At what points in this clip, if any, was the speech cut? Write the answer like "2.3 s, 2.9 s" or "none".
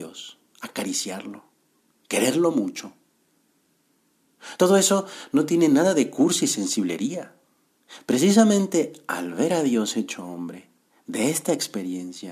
none